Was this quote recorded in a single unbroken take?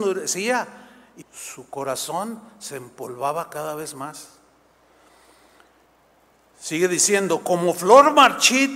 no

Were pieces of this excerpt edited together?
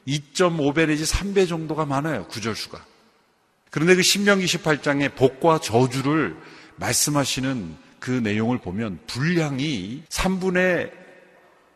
yes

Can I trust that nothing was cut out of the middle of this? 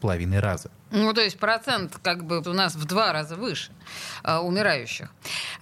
no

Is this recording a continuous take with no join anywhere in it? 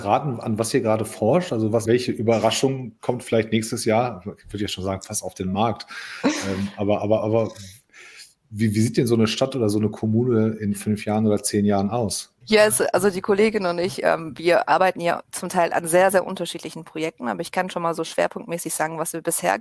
no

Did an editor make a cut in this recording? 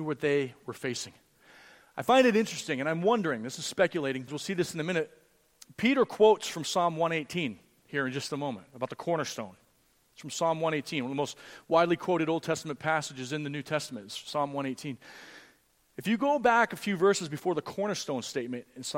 yes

